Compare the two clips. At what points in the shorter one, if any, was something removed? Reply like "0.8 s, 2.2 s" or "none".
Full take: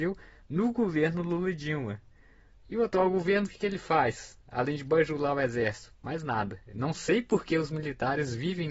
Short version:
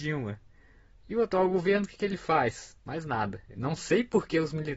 2.8 s